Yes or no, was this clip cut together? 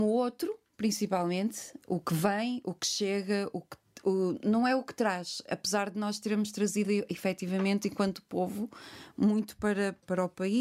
no